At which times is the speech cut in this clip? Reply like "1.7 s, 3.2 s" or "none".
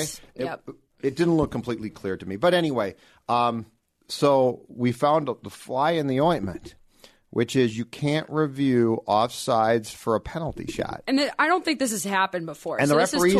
none